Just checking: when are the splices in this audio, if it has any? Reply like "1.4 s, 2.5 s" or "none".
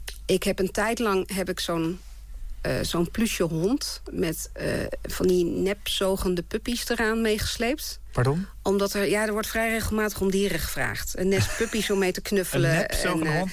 none

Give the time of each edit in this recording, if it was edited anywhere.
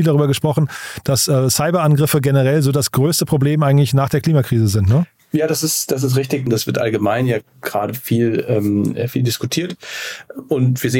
6.5 s

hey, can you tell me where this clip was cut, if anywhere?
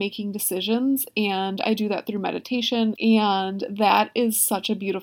2.9 s

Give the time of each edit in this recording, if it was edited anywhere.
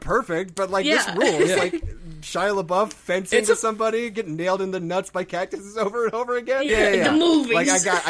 6.7 s

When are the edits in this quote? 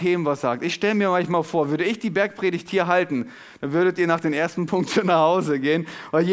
none

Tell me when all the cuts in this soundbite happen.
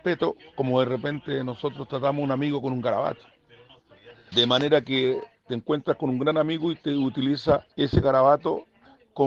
4.3 s, 7.7 s

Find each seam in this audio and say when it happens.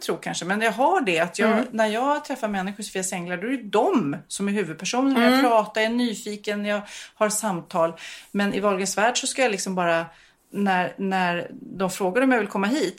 none

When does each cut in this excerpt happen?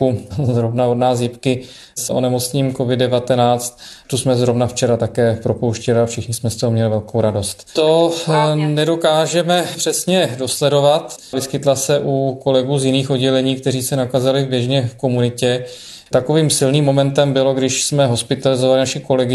7.8 s, 11.3 s, 16.1 s

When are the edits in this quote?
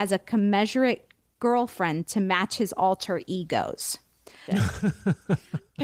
4.5 s

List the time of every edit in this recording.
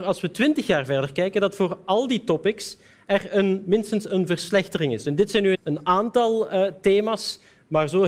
5.5 s

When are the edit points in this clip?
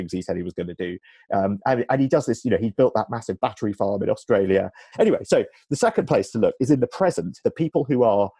4.9 s, 7.4 s

